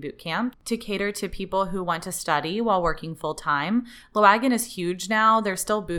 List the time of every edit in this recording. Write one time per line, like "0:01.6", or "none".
none